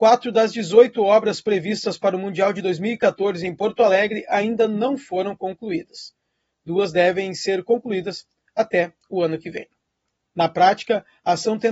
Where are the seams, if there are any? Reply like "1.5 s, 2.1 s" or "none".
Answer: 10.3 s

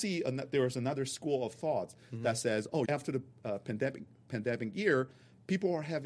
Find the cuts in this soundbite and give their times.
2.9 s

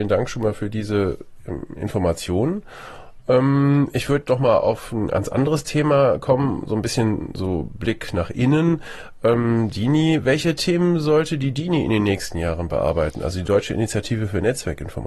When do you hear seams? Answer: none

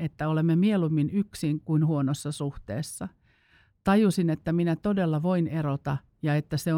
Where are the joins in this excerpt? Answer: none

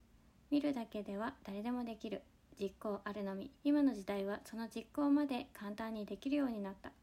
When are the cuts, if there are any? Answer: 3.6 s

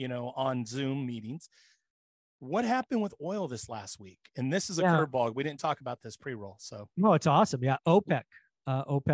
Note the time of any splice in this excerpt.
none

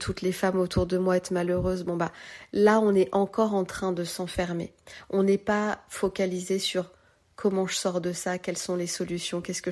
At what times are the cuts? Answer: none

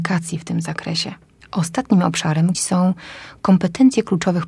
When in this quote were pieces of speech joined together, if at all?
1.4 s, 2.5 s

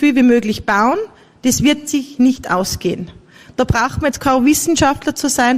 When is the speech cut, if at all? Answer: none

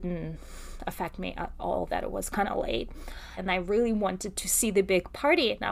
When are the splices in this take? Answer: 3.4 s

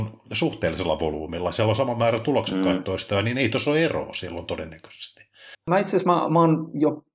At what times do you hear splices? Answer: 5.5 s

